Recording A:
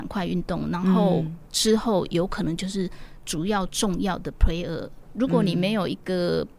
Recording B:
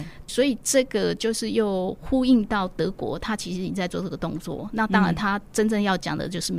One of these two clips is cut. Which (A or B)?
A